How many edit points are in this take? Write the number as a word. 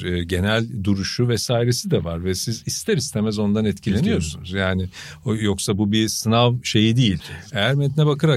one